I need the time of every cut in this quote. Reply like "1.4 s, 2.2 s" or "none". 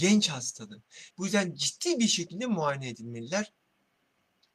1.1 s